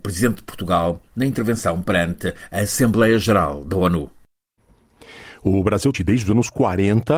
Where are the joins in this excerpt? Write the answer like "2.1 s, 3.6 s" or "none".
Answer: 5.9 s